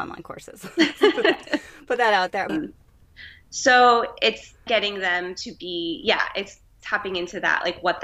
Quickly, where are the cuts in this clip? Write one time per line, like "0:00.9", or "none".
0:02.5
0:04.7